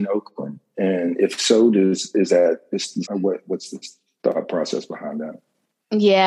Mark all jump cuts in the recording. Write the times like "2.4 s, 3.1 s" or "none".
3.0 s